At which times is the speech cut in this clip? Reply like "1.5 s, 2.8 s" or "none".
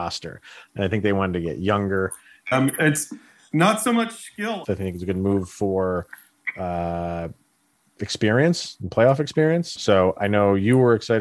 2.5 s, 4.6 s, 9.8 s